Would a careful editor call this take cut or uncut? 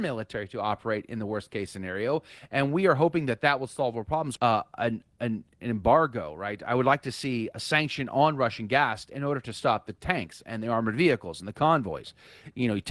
cut